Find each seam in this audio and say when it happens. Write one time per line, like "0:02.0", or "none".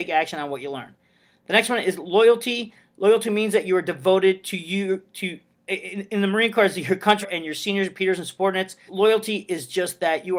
0:07.2
0:08.9